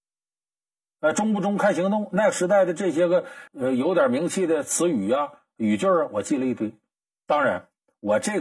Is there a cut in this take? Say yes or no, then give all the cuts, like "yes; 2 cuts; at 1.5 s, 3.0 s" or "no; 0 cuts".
yes; 1 cut; at 3.5 s